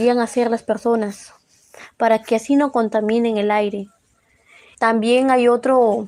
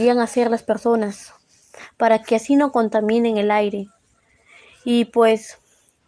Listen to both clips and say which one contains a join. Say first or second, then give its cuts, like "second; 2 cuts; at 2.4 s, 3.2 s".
first; 1 cut; at 4.7 s